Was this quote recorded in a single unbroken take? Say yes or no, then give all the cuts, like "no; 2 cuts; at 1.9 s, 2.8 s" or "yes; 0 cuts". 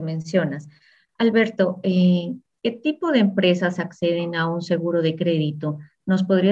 yes; 0 cuts